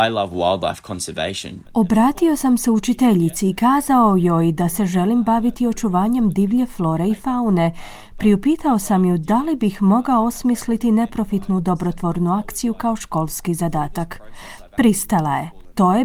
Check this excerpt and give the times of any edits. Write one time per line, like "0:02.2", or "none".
0:01.6